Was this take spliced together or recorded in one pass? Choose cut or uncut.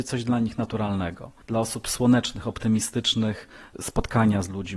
cut